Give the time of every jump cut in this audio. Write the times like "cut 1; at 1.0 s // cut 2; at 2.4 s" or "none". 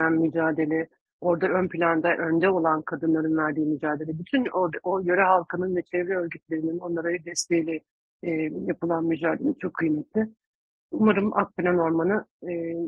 none